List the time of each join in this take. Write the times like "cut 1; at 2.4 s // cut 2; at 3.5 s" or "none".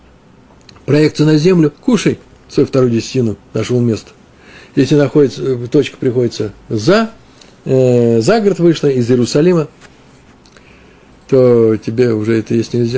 cut 1; at 1.8 s

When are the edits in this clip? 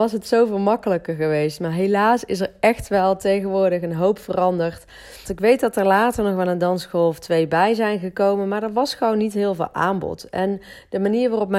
cut 1; at 5.2 s

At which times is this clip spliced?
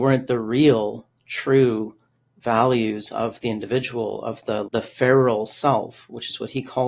cut 1; at 4.6 s

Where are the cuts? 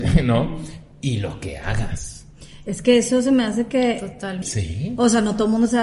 cut 1; at 4.4 s

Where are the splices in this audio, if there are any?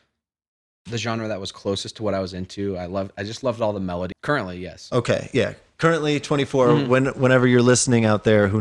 cut 1; at 4.1 s

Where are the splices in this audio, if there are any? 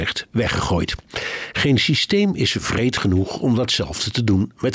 none

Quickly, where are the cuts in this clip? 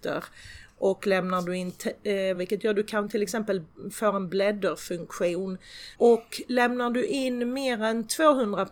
cut 1; at 2.3 s // cut 2; at 5.9 s

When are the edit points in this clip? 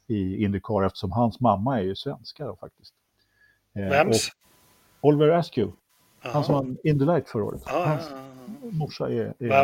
none

